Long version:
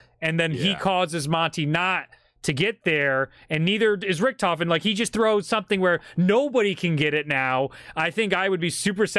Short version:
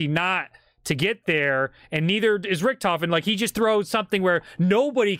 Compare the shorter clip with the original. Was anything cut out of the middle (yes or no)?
no